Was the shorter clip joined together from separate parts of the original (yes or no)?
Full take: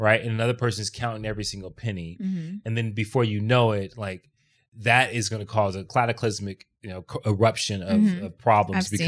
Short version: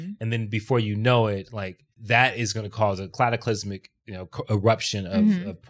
yes